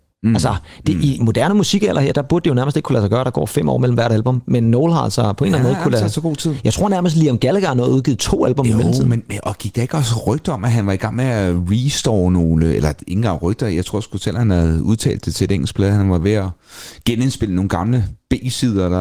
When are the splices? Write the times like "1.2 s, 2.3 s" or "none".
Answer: 1.2 s